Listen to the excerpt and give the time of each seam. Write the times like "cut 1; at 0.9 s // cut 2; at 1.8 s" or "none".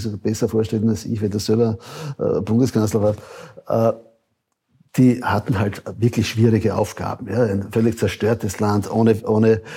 none

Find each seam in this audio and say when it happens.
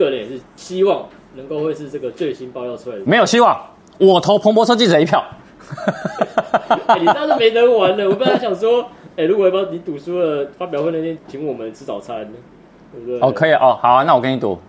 cut 1; at 11.2 s

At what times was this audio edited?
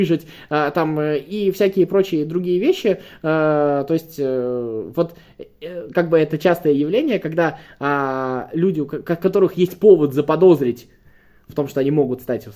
none

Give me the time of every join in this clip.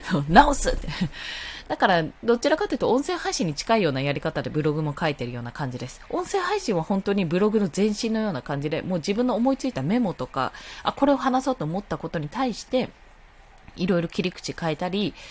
none

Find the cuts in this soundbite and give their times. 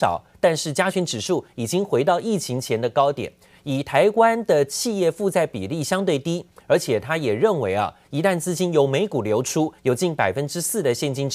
cut 1; at 3.5 s // cut 2; at 9.8 s

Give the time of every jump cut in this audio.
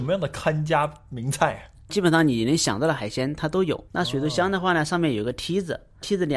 cut 1; at 3.9 s

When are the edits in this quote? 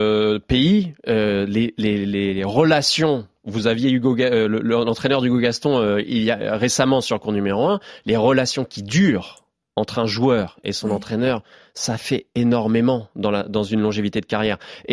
none

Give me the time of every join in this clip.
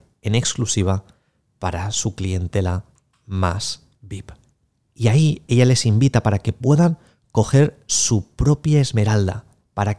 cut 1; at 4.8 s

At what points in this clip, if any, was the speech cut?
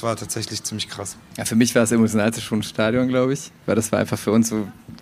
none

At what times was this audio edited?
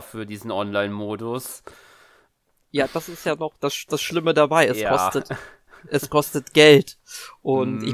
none

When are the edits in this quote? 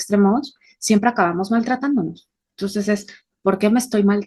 none

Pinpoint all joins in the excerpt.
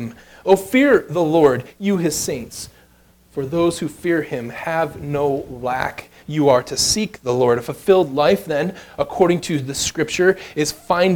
cut 1; at 6.2 s

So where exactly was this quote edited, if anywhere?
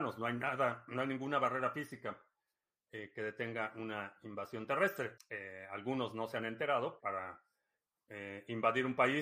cut 1; at 5.2 s // cut 2; at 7.0 s

